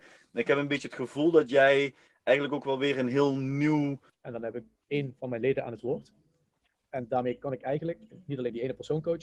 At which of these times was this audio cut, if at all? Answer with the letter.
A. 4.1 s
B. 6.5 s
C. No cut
A